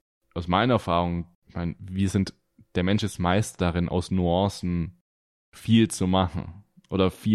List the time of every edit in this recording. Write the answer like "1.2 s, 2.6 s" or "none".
1.3 s

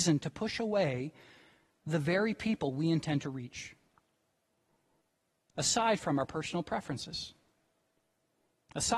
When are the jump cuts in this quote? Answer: none

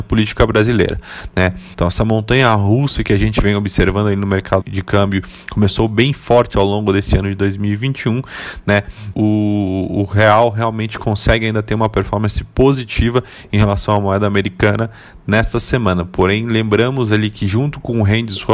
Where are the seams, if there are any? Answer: 1.7 s, 4.6 s, 9.1 s

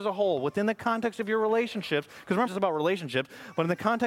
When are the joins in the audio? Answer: 2.5 s

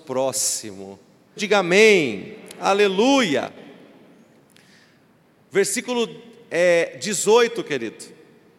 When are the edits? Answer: 1.4 s

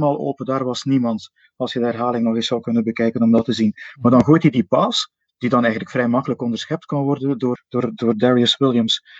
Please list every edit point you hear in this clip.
7.6 s

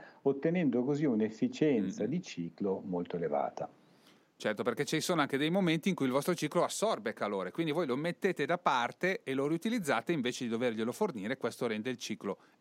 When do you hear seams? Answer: none

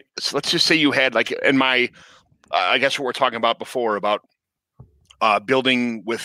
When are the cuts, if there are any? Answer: none

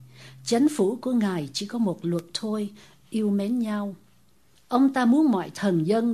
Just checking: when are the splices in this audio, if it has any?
4.5 s

